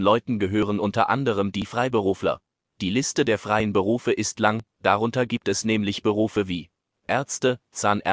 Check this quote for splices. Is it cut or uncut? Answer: cut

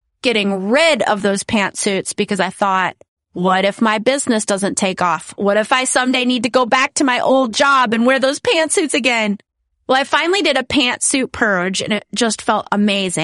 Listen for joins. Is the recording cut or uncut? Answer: uncut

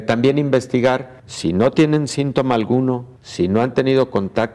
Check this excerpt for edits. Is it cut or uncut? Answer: cut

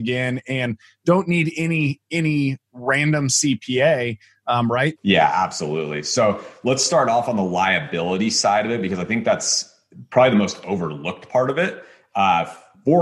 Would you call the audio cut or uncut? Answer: cut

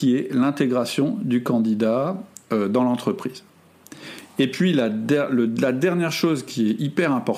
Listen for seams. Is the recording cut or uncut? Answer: uncut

